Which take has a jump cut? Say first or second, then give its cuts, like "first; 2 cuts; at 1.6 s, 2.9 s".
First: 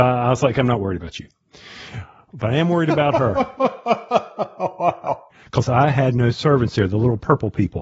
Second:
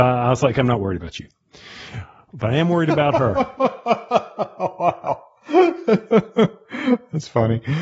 first; 1 cut; at 5.3 s